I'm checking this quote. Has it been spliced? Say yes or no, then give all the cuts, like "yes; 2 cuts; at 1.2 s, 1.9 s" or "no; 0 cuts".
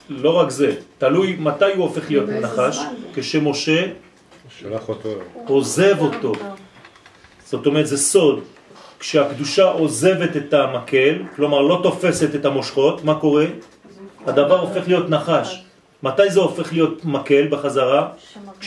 no; 0 cuts